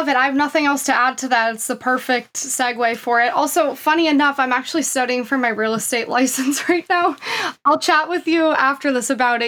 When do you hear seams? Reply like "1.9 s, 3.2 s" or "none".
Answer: none